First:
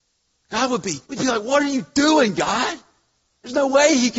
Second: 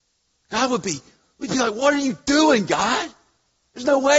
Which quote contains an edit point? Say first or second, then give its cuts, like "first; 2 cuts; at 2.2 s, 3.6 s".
first; 1 cut; at 1.0 s